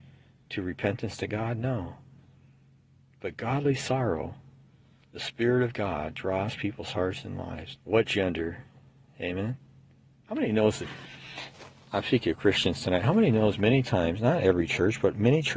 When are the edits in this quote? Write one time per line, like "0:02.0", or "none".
0:07.8